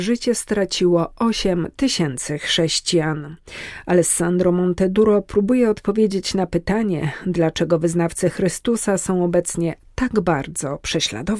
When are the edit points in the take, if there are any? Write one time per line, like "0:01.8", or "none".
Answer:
none